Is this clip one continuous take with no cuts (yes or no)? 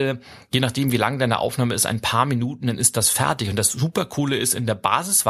yes